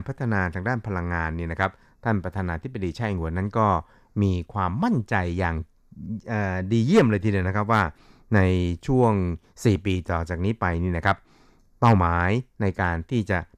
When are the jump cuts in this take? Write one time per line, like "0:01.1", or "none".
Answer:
none